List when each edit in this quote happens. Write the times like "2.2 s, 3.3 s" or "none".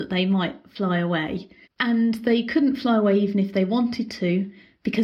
1.6 s